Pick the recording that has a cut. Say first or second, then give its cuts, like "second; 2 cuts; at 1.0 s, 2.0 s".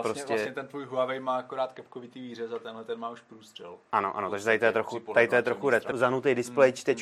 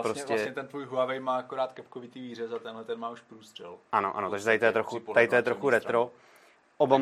first; 1 cut; at 5.9 s